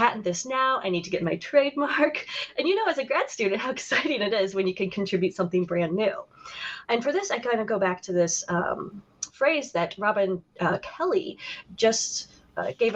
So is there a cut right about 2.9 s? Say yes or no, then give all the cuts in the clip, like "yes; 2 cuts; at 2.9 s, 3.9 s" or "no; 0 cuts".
no; 1 cut; at 6.8 s